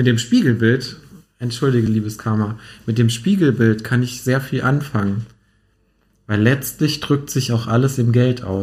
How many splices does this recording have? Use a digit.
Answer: 0